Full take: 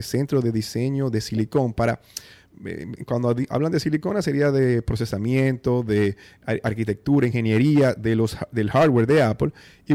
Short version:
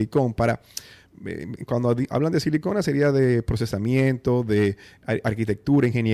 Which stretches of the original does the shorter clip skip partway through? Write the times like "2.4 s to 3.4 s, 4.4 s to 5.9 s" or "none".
none